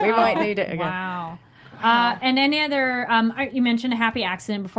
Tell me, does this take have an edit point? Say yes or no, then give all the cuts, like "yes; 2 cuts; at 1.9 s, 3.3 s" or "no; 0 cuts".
no; 0 cuts